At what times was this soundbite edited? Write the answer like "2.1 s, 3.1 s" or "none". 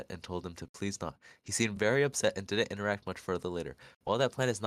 none